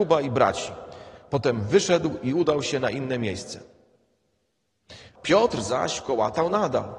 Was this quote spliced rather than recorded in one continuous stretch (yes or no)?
yes